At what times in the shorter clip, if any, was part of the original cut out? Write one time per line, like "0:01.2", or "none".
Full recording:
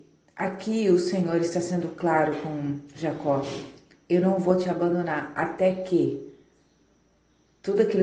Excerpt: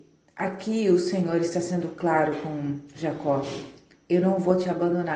none